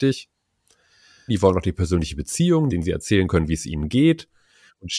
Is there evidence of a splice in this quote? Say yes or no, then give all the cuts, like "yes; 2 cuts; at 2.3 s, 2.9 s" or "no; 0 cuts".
yes; 2 cuts; at 1.3 s, 2.7 s